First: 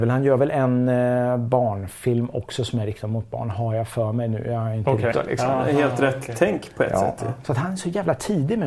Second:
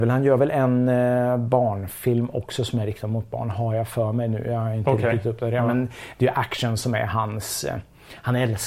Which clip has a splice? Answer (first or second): first